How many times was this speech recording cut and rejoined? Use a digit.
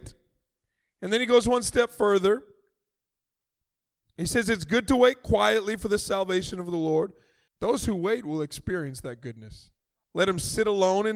2